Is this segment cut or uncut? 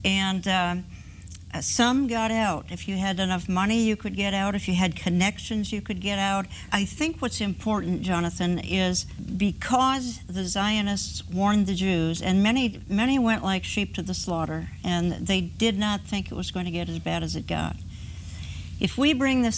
uncut